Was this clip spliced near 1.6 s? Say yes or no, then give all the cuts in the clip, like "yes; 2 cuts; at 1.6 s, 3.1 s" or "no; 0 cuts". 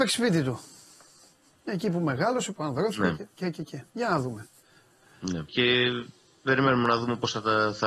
no; 1 cut; at 5.5 s